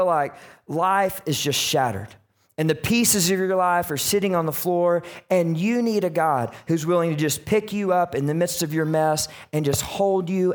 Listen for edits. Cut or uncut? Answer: uncut